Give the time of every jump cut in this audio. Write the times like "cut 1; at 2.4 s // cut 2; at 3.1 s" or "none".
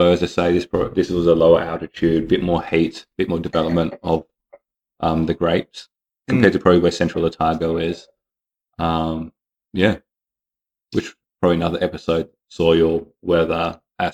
none